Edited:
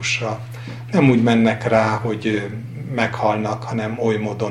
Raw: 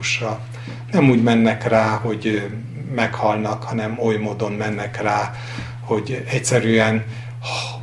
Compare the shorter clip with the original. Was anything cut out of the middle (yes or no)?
no